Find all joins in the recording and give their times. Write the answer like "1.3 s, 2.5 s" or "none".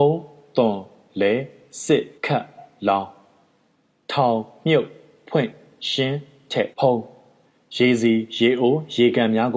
2.2 s, 6.7 s